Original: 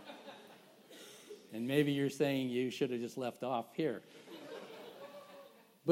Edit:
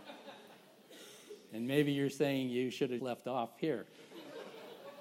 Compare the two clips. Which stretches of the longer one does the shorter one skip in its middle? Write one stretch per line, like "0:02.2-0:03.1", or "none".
0:03.0-0:03.1